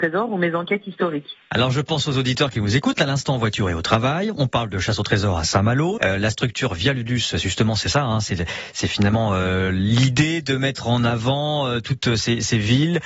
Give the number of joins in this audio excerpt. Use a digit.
1